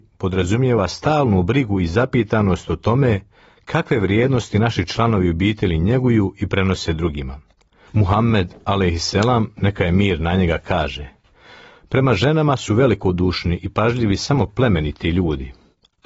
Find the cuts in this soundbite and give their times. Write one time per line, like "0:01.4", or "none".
0:07.9